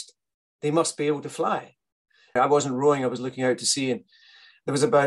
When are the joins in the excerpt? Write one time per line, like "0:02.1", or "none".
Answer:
0:02.4